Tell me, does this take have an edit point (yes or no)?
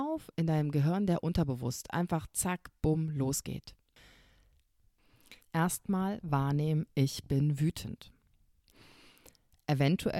yes